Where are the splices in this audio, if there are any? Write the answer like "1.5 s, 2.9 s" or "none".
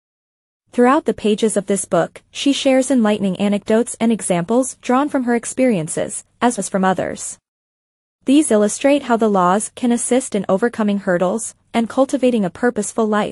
6.6 s, 11.6 s